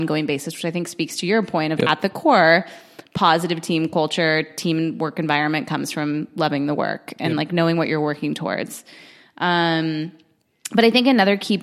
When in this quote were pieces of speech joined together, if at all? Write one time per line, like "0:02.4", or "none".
0:01.8